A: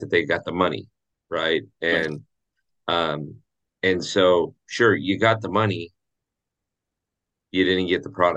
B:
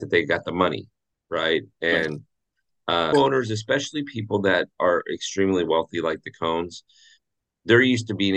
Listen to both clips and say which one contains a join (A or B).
B